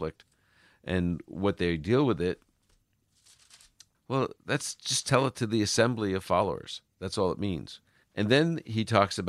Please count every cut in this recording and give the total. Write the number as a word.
two